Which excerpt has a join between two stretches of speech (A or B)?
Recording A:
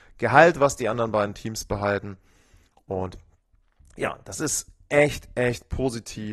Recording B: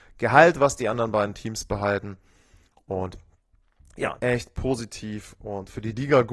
B